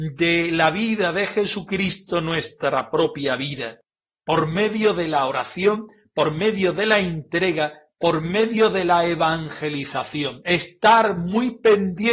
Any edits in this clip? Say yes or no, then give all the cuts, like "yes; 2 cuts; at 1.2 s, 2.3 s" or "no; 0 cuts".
no; 0 cuts